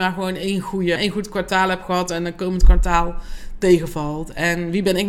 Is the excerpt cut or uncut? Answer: cut